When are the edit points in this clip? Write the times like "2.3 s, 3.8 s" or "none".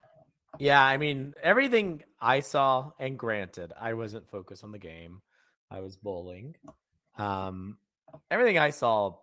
none